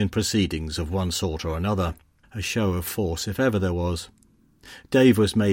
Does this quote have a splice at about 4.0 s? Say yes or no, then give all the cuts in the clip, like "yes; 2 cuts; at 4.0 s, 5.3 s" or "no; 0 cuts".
no; 1 cut; at 2.2 s